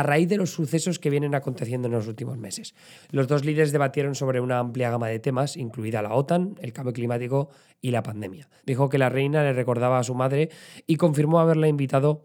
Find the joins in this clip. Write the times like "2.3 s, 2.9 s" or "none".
3.0 s, 8.6 s